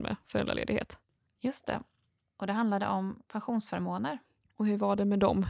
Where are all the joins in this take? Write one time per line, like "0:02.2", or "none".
none